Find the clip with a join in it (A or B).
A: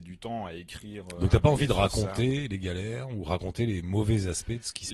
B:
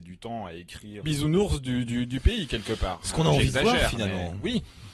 B